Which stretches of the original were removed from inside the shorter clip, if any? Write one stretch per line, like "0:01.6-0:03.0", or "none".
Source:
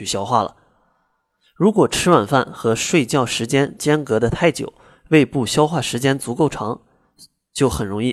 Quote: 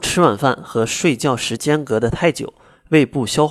0:03.5-0:03.8